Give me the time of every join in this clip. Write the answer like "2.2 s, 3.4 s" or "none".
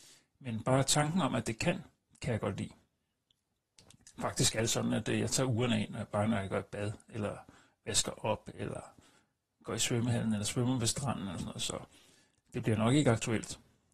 none